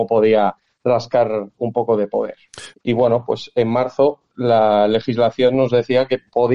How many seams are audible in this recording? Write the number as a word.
one